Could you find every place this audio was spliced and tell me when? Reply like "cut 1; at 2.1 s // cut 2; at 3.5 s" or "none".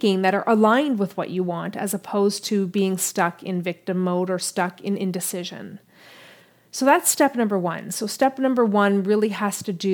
none